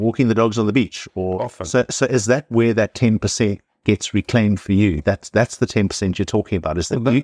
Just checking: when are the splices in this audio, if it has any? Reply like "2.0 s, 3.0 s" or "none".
none